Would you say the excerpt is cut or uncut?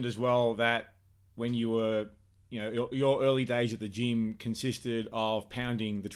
uncut